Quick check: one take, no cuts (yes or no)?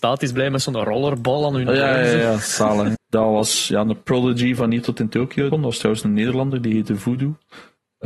no